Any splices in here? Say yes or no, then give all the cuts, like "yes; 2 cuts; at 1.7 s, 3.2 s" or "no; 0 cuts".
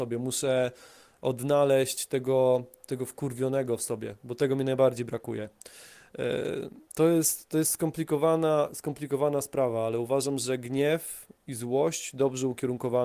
yes; 1 cut; at 6.9 s